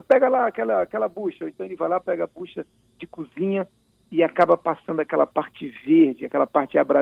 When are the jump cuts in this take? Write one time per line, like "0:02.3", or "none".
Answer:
none